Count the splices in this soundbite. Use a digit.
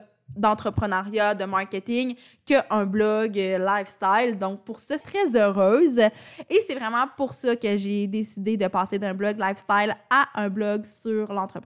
1